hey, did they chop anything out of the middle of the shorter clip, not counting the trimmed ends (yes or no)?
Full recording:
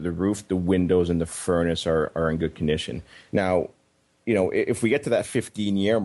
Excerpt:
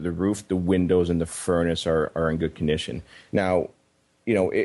no